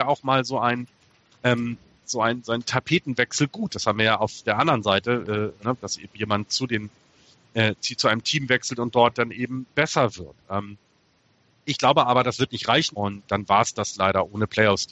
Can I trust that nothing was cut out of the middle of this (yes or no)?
no